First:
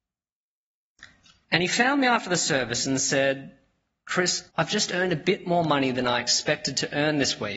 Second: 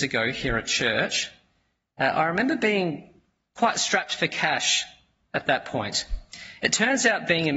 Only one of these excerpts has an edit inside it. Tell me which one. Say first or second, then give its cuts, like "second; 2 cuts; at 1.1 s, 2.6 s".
first; 2 cuts; at 1.4 s, 4.5 s